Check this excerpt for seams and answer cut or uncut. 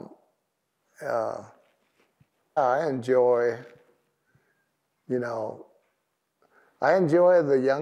cut